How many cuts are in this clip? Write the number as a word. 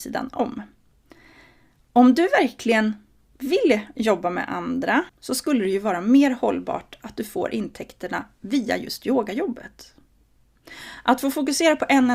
one